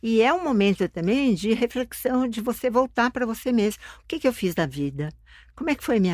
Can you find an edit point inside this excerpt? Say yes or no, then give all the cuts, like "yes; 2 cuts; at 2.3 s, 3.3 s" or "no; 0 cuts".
no; 0 cuts